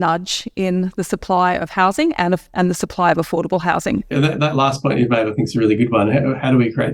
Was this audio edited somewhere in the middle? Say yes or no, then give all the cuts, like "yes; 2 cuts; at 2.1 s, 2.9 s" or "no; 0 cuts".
yes; 1 cut; at 4.1 s